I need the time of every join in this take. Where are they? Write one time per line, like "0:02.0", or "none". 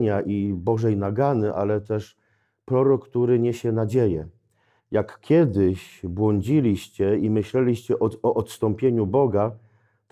0:04.8